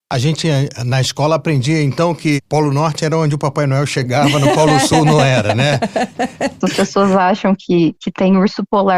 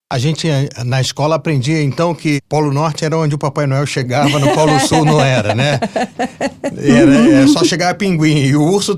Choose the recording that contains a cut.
first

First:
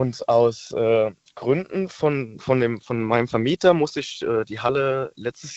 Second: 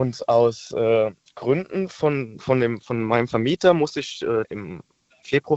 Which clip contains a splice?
second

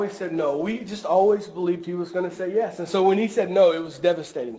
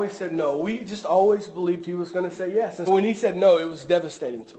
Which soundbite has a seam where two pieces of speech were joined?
second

